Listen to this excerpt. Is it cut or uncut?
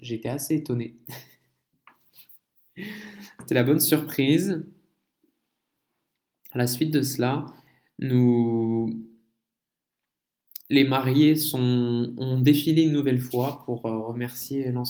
uncut